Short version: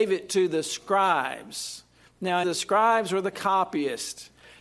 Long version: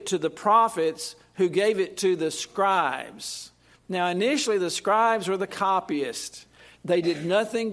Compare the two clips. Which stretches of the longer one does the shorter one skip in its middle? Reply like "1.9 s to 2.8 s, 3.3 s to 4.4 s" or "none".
4.1 s to 4.6 s